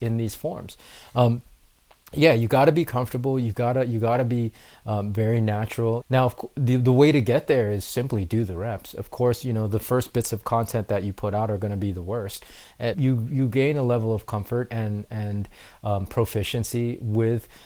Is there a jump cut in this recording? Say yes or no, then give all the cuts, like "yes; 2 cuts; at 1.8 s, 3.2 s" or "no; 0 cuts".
yes; 2 cuts; at 6.0 s, 12.9 s